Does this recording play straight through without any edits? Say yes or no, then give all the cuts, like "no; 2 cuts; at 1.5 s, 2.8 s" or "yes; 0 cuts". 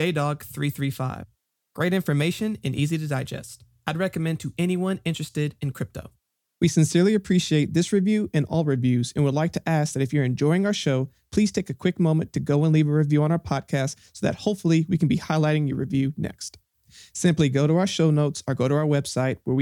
yes; 0 cuts